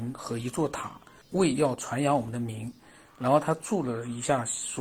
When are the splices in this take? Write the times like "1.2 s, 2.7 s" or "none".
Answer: 1.2 s